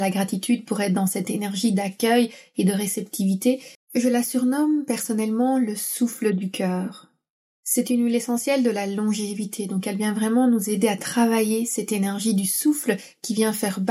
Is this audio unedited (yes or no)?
no